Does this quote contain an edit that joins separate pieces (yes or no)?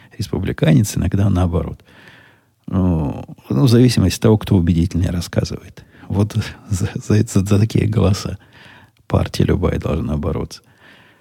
no